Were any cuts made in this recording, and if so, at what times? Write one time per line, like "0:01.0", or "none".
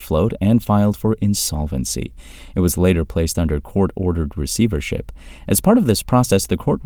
none